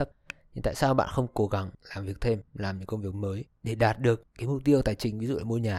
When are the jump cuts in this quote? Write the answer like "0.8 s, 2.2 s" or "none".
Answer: none